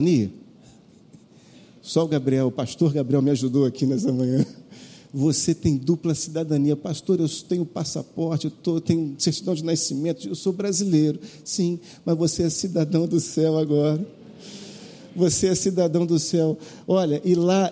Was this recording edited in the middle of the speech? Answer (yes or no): no